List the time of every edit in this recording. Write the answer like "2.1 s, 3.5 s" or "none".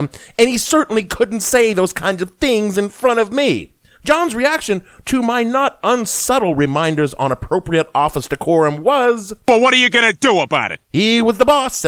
none